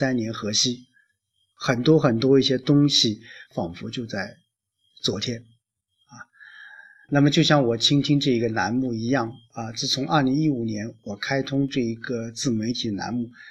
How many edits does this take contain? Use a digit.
1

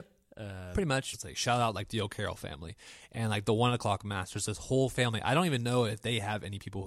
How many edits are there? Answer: 1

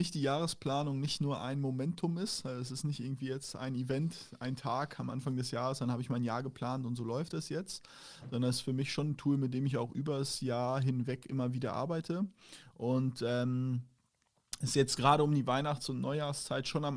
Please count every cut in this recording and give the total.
0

